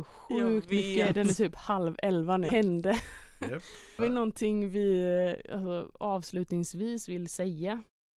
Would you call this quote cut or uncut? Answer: cut